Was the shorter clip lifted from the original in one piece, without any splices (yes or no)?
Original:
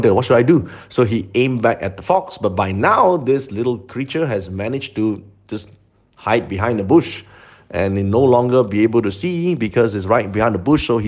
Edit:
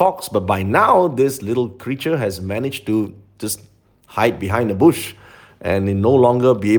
yes